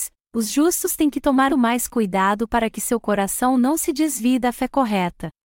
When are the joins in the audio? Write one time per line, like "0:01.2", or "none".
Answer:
0:01.5

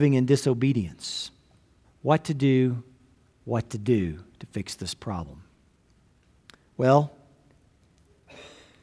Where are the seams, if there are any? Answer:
0:01.8

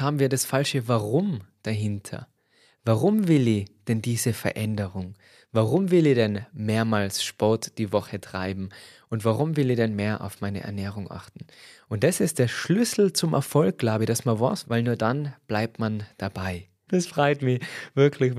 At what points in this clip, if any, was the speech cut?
0:14.6
0:16.9

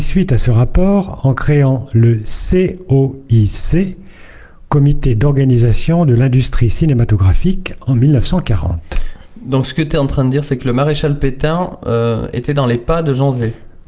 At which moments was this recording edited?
none

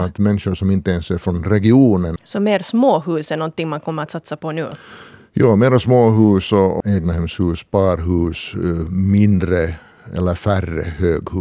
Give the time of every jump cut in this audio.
0:02.2
0:06.8

